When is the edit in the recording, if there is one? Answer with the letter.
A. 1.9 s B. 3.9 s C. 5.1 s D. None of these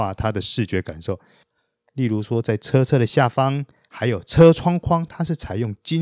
D